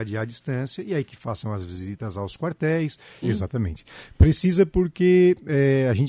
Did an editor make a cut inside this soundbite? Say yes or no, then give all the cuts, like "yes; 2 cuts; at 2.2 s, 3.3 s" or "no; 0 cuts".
yes; 2 cuts; at 1.1 s, 3.2 s